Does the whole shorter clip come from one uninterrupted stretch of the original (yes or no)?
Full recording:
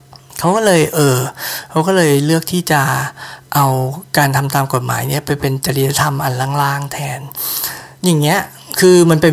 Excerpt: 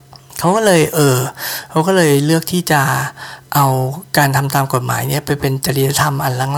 yes